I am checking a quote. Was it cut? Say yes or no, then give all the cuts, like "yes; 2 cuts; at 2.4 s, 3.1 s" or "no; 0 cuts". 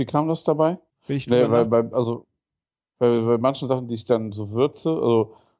yes; 1 cut; at 0.9 s